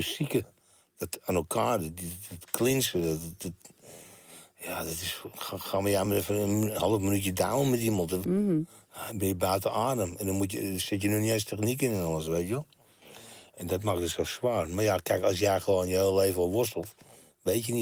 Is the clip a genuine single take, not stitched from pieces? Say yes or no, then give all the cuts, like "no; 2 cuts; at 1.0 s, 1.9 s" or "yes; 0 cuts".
yes; 0 cuts